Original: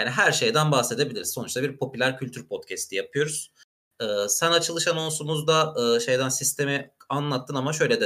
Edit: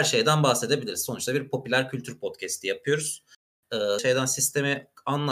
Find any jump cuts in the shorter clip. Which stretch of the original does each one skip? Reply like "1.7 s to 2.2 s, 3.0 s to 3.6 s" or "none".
4.3 s to 6.0 s